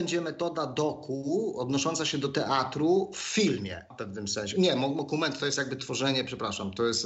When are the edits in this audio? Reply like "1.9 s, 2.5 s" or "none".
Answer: 3.9 s